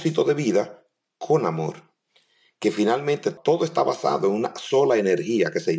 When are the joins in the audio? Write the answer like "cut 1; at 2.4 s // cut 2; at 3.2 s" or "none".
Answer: none